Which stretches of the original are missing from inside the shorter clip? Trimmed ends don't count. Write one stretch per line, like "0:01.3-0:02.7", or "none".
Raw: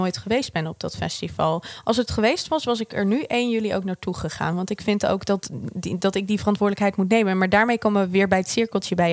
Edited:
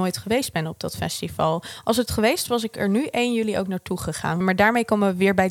0:02.5-0:02.6
0:04.6-0:07.3